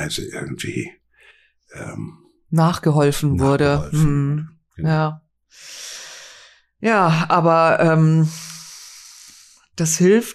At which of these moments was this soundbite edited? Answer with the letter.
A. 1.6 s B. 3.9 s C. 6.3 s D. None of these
D